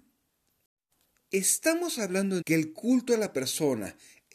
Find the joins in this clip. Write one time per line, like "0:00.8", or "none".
0:02.4